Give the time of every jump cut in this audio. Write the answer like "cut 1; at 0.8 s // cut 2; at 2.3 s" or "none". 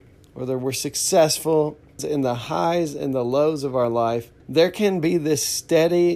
cut 1; at 2.0 s // cut 2; at 4.4 s